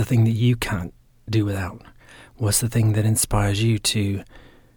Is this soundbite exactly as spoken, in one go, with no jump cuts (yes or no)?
yes